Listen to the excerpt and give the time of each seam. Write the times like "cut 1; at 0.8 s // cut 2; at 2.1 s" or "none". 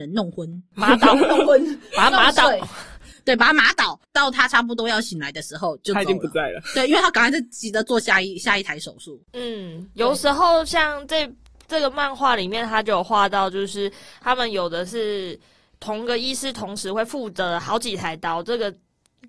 none